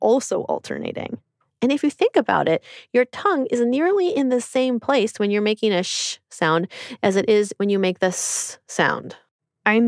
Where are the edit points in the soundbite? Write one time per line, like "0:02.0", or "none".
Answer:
0:01.6